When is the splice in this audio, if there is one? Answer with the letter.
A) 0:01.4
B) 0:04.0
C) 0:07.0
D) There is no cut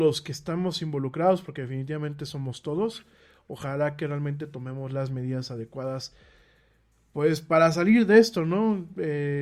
D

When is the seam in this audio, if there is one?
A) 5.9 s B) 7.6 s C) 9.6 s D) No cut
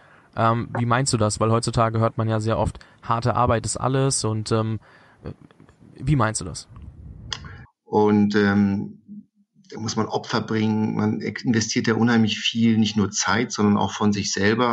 B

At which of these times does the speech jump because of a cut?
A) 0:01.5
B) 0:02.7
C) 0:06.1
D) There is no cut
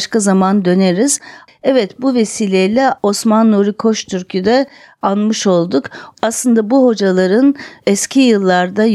A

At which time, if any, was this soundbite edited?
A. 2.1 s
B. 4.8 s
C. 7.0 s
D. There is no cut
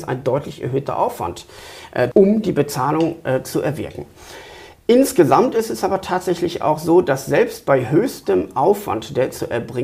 A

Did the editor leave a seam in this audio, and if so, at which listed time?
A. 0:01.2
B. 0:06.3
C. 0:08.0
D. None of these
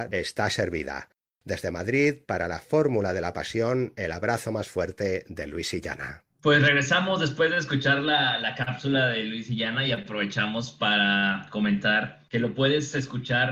B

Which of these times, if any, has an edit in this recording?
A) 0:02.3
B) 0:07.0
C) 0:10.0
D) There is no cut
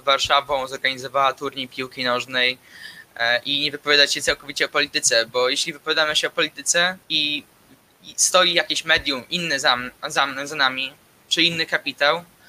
B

